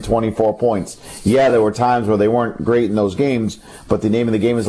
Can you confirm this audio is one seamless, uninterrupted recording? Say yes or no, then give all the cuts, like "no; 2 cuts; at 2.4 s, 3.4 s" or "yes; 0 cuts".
yes; 0 cuts